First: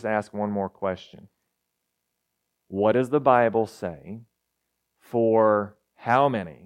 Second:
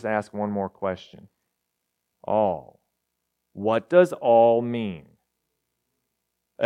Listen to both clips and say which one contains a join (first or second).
second